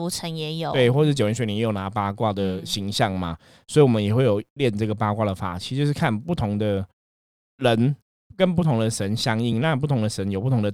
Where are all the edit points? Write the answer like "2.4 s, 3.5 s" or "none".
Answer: none